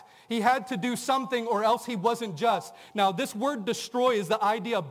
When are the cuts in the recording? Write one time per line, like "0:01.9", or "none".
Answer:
none